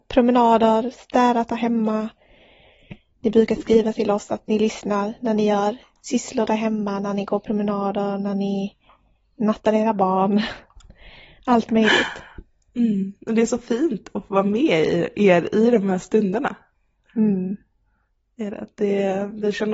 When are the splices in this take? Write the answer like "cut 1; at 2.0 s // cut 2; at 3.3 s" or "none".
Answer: none